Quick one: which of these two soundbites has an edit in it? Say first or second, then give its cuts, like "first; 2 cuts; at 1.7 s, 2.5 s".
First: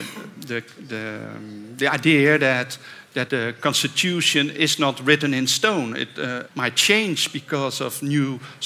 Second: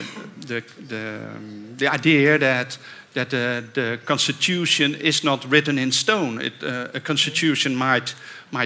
first; 2 cuts; at 3.3 s, 6.5 s